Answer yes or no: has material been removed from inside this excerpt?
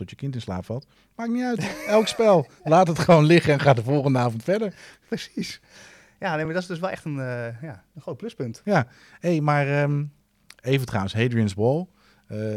no